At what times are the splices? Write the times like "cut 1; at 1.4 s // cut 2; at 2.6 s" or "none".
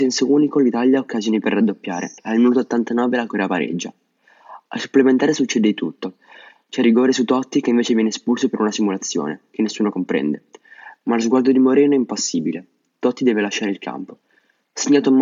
cut 1; at 2.2 s